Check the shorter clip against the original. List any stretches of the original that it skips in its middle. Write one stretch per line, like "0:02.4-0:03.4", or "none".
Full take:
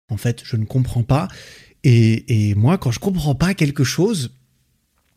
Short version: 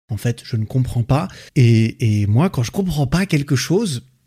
0:01.5-0:01.8